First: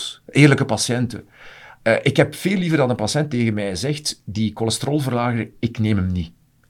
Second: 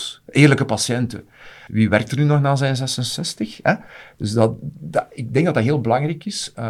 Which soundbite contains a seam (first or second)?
second